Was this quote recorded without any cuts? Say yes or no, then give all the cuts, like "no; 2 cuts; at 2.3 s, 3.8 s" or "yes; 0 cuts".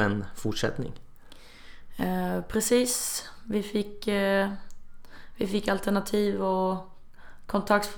yes; 0 cuts